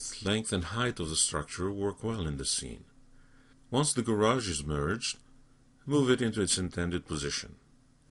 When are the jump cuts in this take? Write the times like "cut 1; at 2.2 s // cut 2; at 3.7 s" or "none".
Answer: cut 1; at 3.5 s